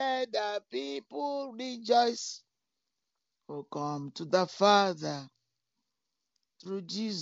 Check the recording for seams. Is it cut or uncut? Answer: uncut